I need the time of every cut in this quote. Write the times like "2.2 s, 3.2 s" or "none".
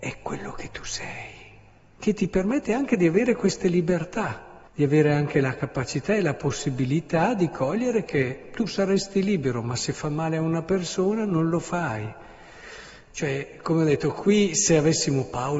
4.7 s, 13.1 s